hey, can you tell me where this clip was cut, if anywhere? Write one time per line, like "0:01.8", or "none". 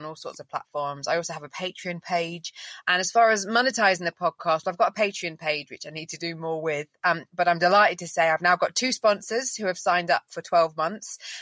0:02.8